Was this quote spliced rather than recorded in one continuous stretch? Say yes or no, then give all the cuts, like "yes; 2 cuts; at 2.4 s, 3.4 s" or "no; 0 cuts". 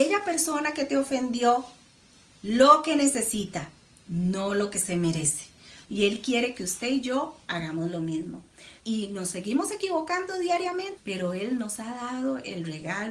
yes; 3 cuts; at 5.8 s, 8.8 s, 11.0 s